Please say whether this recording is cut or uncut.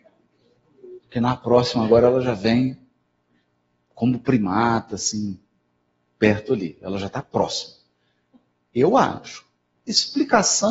cut